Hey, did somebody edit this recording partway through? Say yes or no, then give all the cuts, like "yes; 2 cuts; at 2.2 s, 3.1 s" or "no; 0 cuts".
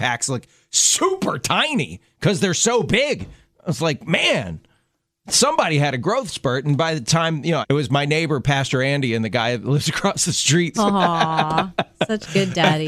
yes; 2 cuts; at 7.6 s, 10.7 s